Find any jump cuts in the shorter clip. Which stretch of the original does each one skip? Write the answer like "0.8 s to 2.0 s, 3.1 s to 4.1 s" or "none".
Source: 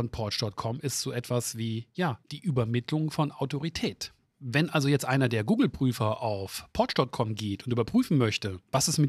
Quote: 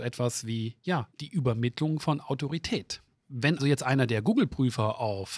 4.7 s to 4.8 s